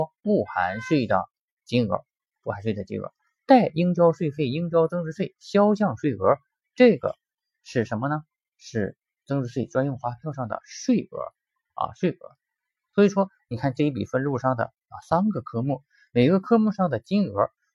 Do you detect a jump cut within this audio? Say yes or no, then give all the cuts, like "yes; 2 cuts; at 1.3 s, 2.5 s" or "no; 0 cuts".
yes; 1 cut; at 3.4 s